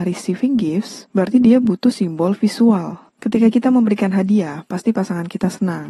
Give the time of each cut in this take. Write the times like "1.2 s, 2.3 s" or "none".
none